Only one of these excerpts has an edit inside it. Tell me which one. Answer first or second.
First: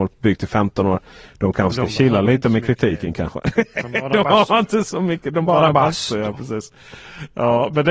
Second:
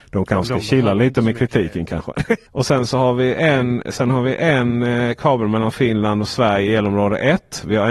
second